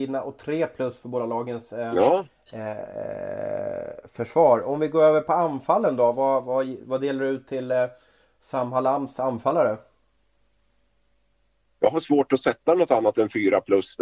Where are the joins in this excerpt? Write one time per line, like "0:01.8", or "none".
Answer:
none